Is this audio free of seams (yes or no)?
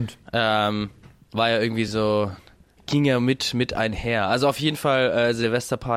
yes